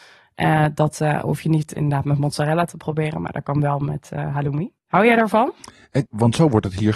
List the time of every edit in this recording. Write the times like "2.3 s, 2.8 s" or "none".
4.8 s, 6.1 s